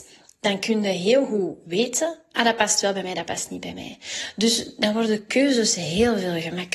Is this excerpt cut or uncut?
uncut